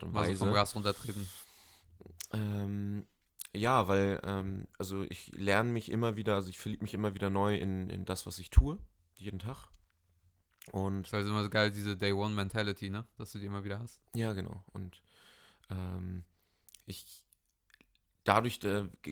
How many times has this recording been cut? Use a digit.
0